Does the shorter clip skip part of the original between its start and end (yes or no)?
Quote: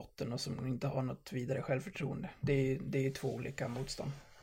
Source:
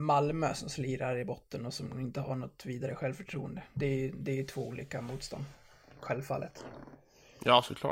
no